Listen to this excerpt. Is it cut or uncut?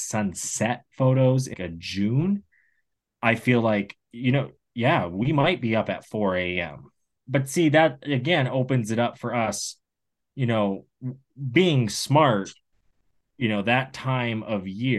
cut